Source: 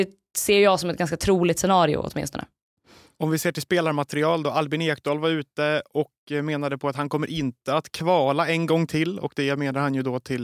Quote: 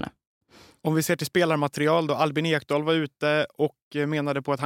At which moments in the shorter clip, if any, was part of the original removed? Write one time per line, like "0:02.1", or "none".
none